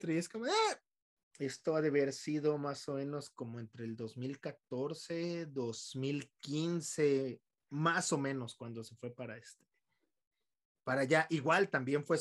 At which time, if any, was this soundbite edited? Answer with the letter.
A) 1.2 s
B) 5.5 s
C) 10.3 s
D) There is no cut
A